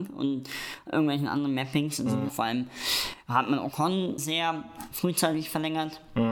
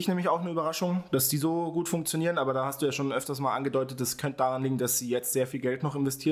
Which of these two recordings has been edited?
first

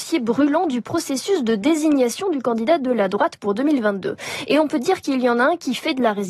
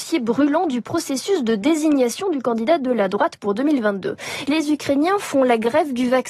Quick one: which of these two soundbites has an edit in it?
second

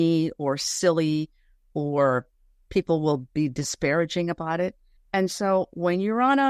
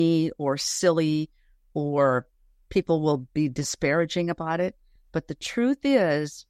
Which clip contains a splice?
first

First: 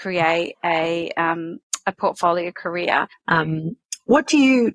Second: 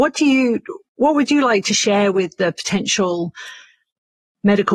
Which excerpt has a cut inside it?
first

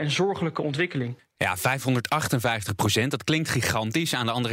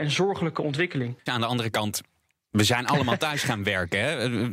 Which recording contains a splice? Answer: second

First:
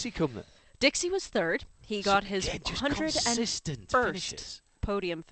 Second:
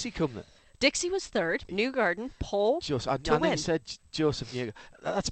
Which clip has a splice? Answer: second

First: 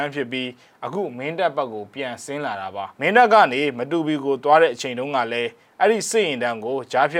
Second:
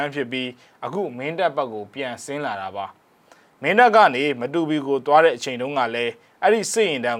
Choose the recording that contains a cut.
first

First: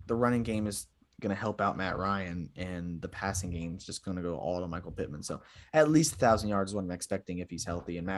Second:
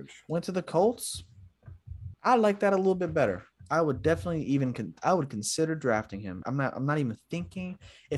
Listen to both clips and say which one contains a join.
second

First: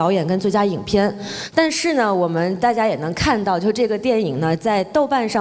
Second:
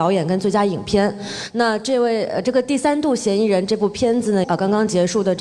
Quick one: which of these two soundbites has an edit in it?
second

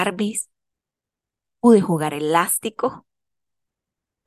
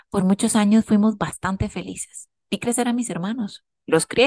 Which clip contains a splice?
second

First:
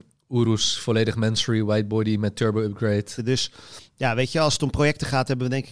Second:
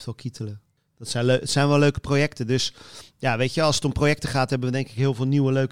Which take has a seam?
first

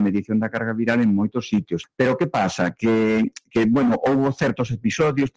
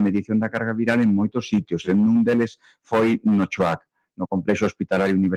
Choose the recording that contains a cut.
first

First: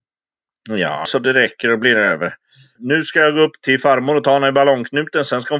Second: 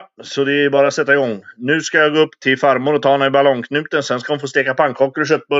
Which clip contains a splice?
first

